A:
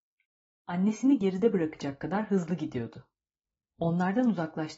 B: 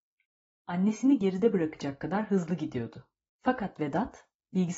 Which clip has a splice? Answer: B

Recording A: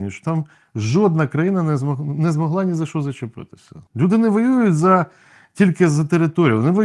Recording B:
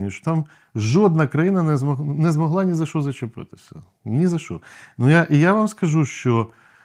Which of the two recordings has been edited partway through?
A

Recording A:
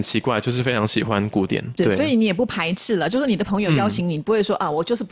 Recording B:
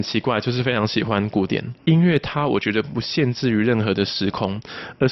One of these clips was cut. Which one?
B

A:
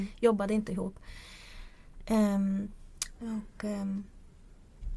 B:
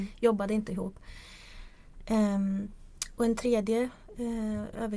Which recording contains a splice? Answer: A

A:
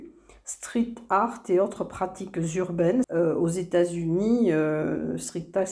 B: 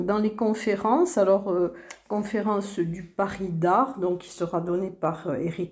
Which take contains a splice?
A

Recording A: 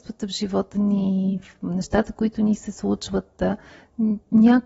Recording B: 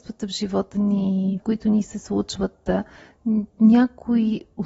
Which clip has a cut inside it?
B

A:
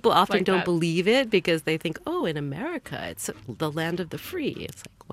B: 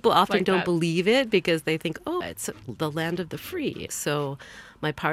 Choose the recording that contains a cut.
B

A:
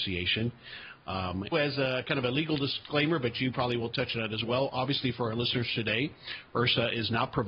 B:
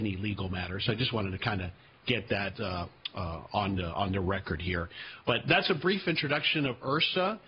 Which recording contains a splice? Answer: A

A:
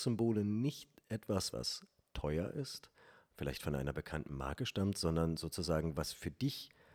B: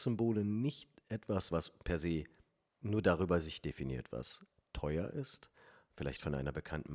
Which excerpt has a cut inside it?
A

